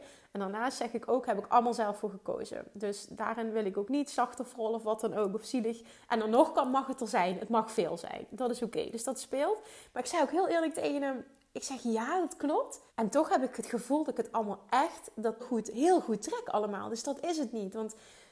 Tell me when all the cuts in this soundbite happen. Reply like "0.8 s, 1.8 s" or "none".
12.9 s, 15.4 s

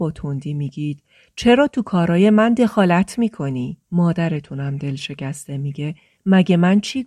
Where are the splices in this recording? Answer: 3.8 s

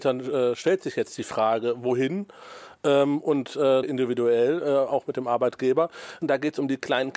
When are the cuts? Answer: 3.8 s, 6.2 s

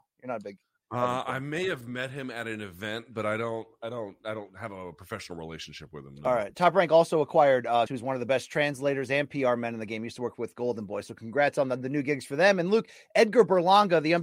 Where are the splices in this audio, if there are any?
7.9 s

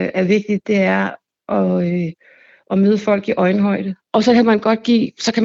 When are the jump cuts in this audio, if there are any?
4.1 s

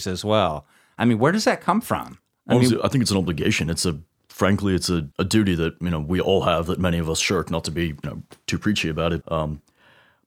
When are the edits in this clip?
5.1 s, 9.2 s

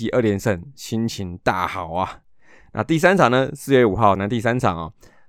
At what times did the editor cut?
4.2 s

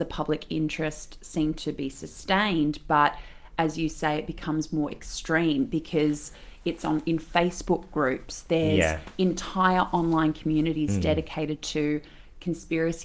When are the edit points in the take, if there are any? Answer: none

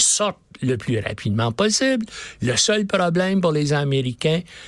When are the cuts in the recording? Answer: none

